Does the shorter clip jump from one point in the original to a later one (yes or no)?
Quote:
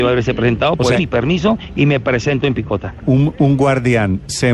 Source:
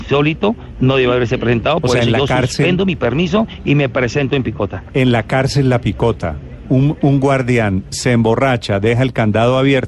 yes